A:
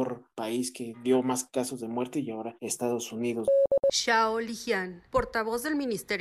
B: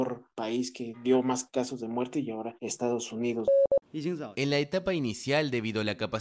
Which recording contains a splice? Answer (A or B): B